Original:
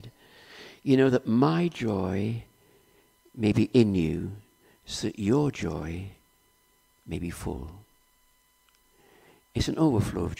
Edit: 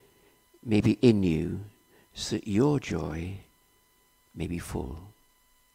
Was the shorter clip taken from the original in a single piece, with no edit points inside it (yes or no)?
yes